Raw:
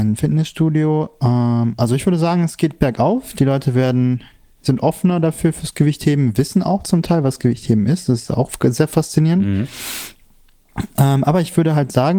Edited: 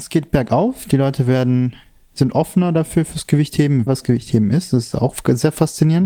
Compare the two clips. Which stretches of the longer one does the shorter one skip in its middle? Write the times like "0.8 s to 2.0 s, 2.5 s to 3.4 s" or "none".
6.3 s to 7.2 s